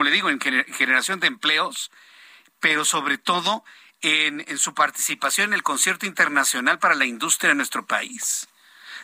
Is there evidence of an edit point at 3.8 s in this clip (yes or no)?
no